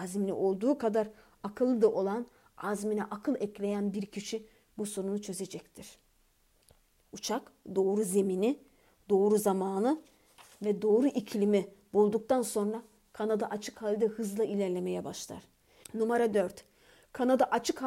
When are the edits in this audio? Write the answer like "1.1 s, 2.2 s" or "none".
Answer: 6.9 s, 15.8 s